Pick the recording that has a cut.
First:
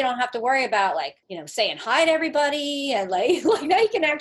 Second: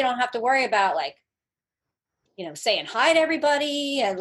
first; 1 cut; at 1.2 s

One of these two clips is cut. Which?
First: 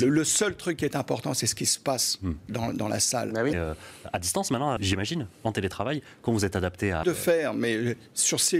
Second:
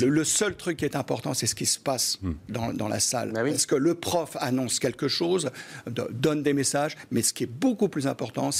first; 3 cuts; at 3.5 s, 4.8 s, 7.0 s

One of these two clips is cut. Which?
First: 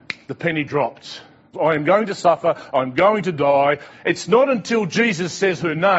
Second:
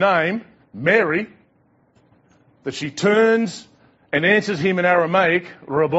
first; 2 cuts; at 1.5 s, 3.9 s

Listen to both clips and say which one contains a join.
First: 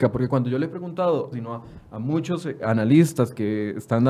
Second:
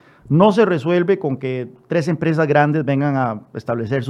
first; 2 cuts; at 1.3 s, 2.6 s

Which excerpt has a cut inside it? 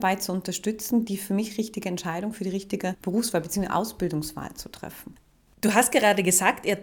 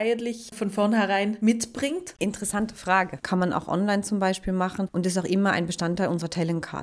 second; 1 cut; at 3.2 s

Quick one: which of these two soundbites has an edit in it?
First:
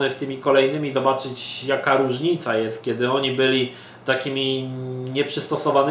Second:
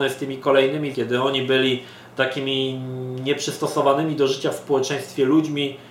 second; 1 cut; at 0.9 s

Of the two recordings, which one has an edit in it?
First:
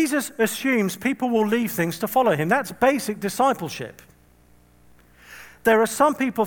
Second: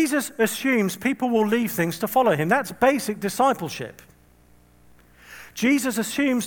first; 1 cut; at 5.5 s

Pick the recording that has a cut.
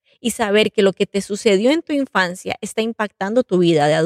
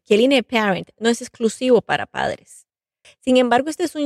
second; 1 cut; at 3.0 s

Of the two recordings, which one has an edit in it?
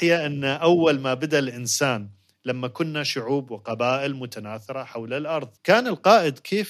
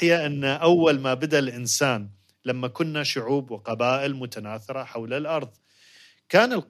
first; 1 cut; at 5.6 s

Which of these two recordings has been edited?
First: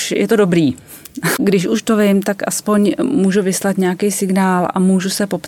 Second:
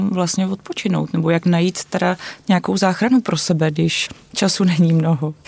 first; 1 cut; at 1.4 s

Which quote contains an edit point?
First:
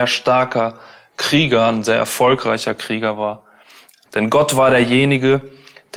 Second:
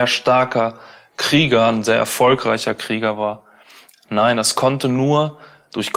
first; 1 cut; at 4.1 s

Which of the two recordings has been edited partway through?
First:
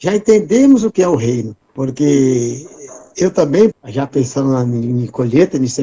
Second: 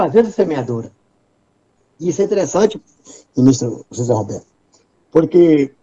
first; 2 cuts; at 1.6 s, 3.7 s

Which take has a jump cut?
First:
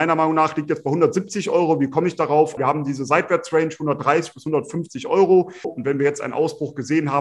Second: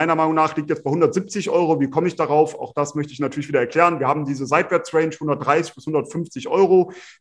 first; 2 cuts; at 2.6 s, 5.6 s

